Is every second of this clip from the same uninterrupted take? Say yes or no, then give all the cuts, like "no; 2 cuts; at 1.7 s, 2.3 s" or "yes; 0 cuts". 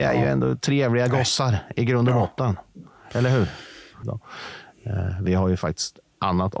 no; 1 cut; at 4.0 s